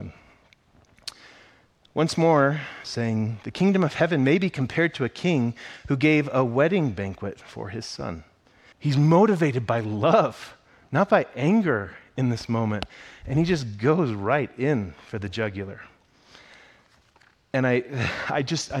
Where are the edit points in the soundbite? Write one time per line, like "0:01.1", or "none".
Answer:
0:02.8
0:08.7